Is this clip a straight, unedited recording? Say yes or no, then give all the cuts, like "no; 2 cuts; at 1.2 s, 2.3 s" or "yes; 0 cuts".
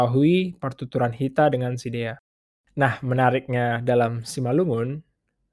yes; 0 cuts